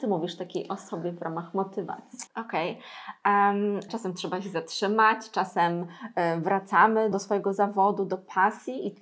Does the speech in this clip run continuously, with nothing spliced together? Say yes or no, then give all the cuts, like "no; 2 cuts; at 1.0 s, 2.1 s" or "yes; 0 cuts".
no; 3 cuts; at 2.3 s, 3.9 s, 7.1 s